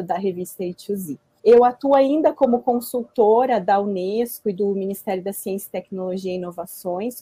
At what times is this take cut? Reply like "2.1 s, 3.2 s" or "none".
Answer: 1.4 s